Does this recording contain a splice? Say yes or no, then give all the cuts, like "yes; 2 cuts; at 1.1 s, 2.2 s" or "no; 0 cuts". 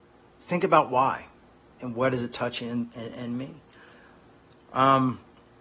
yes; 1 cut; at 1.8 s